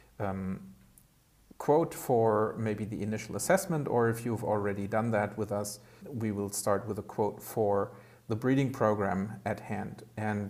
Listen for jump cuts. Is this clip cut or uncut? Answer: cut